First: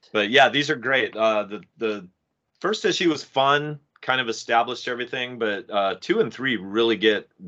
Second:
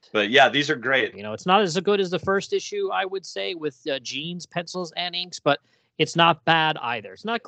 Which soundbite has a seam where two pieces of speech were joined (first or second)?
second